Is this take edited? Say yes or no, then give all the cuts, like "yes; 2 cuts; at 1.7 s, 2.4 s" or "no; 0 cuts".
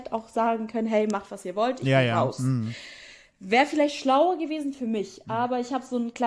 no; 0 cuts